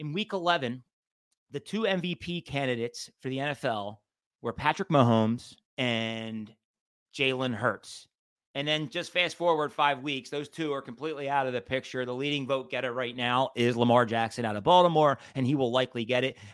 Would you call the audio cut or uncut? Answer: cut